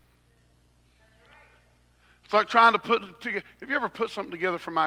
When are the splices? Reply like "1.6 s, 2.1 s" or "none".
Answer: none